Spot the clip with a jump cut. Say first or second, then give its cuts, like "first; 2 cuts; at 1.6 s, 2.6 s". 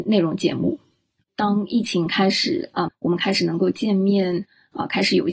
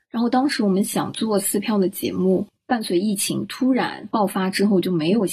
first; 2 cuts; at 1.2 s, 2.9 s